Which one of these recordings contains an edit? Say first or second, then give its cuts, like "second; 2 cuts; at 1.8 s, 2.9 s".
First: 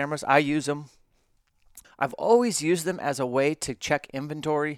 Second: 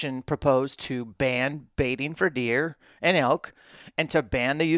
first; 1 cut; at 1.8 s